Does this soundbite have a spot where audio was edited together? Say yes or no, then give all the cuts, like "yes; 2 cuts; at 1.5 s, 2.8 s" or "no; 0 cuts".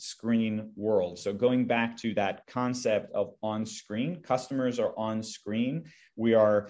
no; 0 cuts